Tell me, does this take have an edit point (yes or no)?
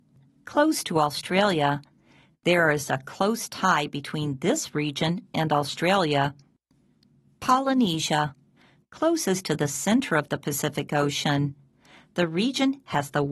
no